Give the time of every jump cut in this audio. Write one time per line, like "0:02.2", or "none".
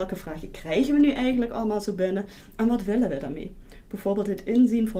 none